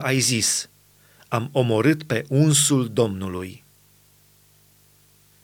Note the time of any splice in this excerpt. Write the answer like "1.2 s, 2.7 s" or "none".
none